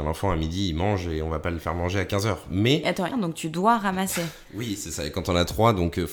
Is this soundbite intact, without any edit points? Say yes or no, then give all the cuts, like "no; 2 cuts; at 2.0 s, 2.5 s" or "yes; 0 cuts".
no; 1 cut; at 3.1 s